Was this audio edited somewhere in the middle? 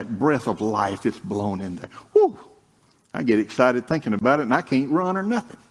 no; 0 cuts

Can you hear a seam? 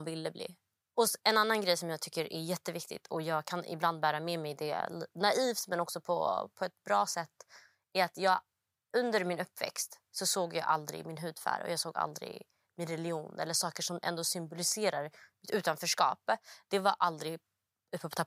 no; 0 cuts

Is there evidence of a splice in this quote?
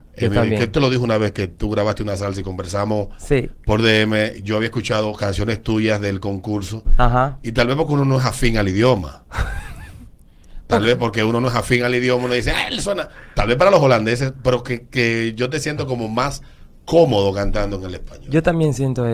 no; 0 cuts

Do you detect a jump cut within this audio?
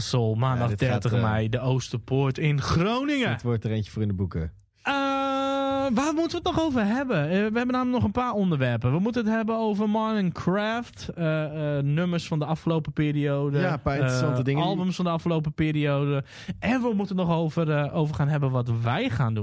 no; 0 cuts

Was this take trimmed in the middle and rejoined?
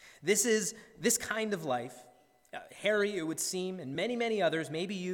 no; 0 cuts

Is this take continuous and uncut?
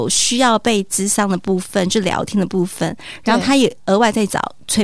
yes; 0 cuts

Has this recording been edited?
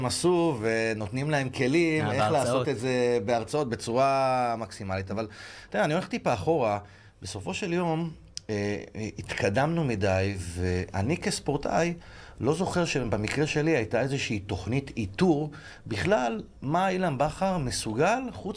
no; 0 cuts

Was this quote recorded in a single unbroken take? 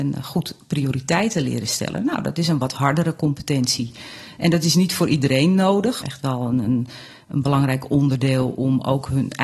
no; 1 cut; at 6.0 s

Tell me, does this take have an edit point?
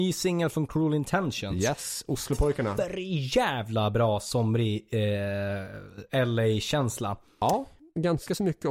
no; 0 cuts

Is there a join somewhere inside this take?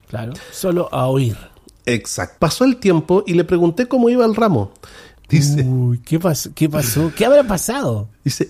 yes; 2 cuts; at 2.4 s, 5.2 s

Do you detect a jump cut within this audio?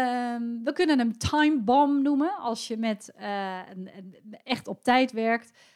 no; 0 cuts

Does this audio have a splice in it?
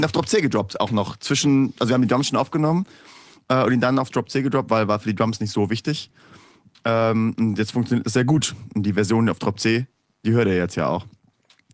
no; 0 cuts

